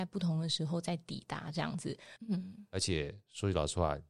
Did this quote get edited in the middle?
yes; 1 cut; at 2.2 s

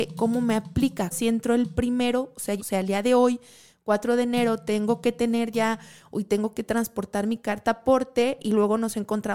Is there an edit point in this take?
yes; 2 cuts; at 1.1 s, 2.6 s

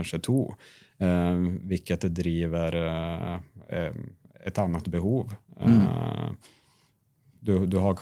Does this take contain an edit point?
no; 0 cuts

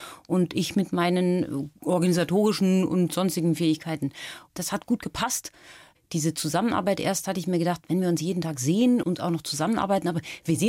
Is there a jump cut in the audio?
yes; 1 cut; at 9.0 s

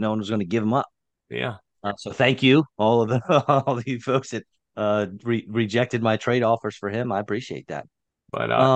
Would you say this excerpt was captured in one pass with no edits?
yes; 0 cuts

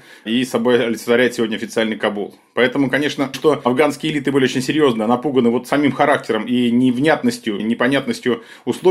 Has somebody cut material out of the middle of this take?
yes; 2 cuts; at 3.3 s, 7.6 s

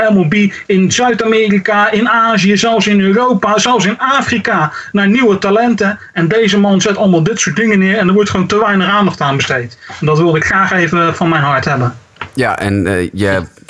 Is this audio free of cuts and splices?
yes; 0 cuts

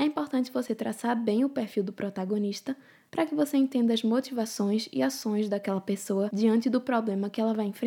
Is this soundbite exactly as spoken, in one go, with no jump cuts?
yes; 0 cuts

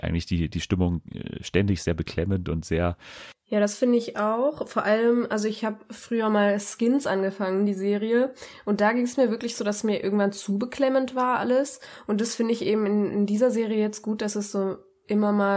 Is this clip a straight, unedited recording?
yes; 0 cuts

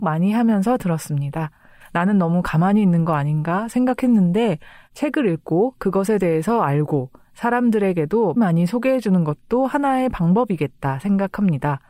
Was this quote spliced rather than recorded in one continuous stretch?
yes; 2 cuts; at 1.8 s, 8.4 s

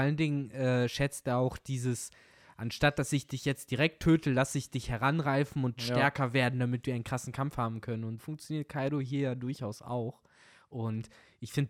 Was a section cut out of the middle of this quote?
yes; 1 cut; at 8.2 s

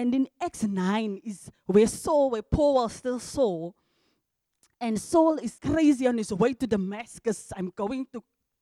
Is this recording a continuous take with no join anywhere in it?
no; 1 cut; at 5.6 s

